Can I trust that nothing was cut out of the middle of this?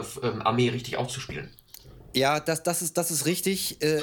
yes; 0 cuts

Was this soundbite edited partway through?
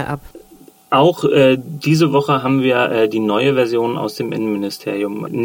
no; 0 cuts

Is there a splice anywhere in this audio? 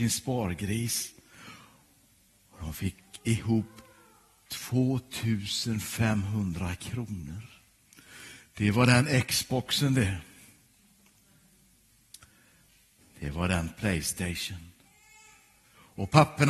no; 0 cuts

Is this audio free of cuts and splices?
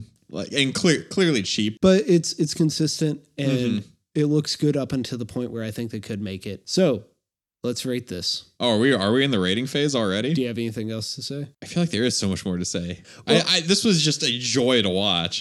yes; 0 cuts

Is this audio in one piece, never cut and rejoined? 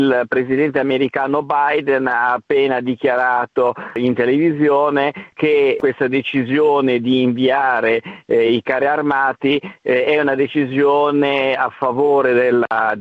yes; 0 cuts

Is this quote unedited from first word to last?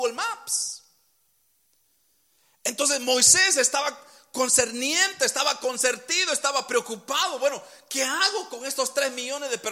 yes; 0 cuts

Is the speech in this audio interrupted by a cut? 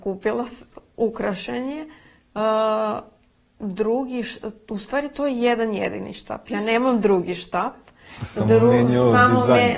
no; 0 cuts

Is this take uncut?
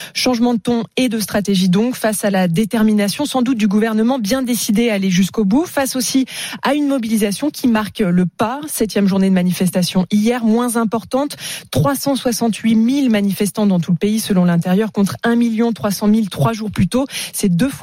yes; 0 cuts

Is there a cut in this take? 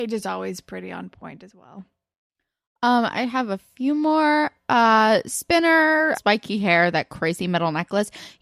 yes; 1 cut; at 6.1 s

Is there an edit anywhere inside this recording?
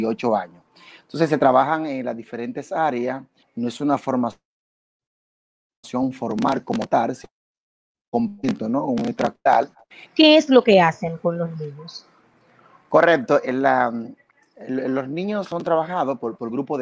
yes; 2 cuts; at 3.4 s, 10.1 s

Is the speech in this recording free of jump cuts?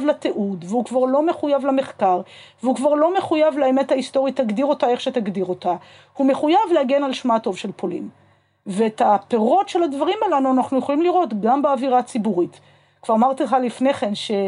yes; 0 cuts

